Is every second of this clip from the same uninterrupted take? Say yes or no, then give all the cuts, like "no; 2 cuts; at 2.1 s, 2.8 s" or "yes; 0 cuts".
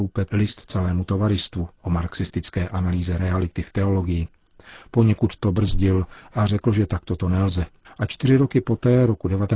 no; 1 cut; at 7.8 s